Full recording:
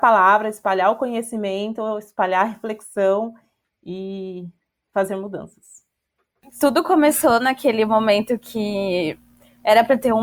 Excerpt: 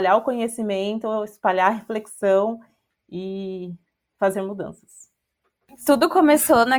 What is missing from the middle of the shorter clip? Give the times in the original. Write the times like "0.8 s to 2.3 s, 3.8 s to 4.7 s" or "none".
none

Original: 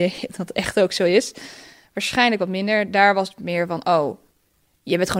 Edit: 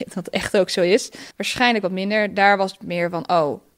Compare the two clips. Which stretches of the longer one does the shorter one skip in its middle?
1.5 s to 1.9 s

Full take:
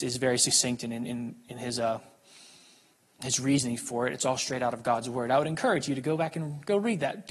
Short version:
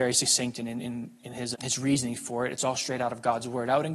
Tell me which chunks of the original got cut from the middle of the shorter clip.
1.8 s to 3.1 s

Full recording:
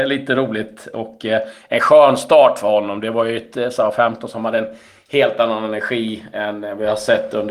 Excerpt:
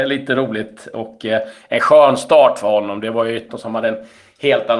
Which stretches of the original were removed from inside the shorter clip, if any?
3.5 s to 4.2 s

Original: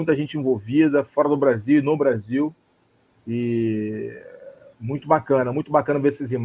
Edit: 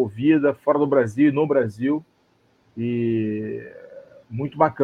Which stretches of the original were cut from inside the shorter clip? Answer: none

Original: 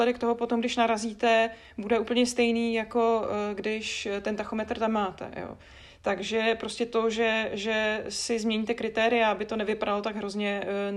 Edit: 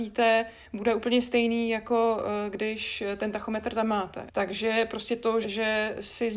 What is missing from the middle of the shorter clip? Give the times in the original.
5.3 s to 6.0 s, 7.1 s to 7.5 s

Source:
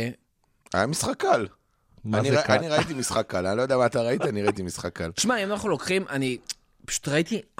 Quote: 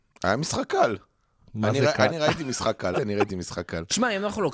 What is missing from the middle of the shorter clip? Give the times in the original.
3.4 s to 4.2 s

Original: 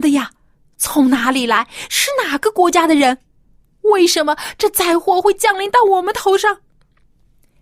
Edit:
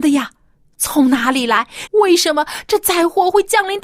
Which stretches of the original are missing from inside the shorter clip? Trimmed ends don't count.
1.9 s to 3.8 s

